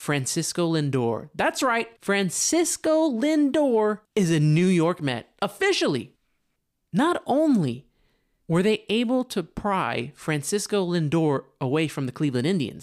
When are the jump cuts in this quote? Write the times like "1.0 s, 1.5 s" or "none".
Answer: 4.1 s, 6.8 s